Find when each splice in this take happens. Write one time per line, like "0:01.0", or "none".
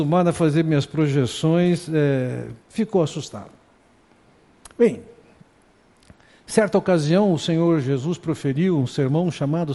none